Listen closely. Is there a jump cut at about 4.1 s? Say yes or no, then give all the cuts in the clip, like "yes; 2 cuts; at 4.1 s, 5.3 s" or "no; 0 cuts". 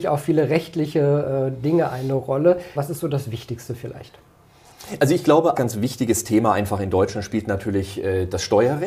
no; 2 cuts; at 2.7 s, 5.5 s